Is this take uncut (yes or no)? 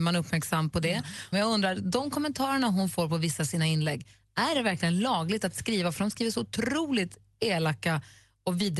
no